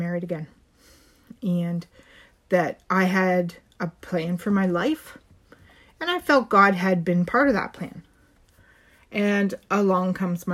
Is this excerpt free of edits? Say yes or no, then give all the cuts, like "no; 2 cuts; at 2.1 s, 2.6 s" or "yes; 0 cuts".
yes; 0 cuts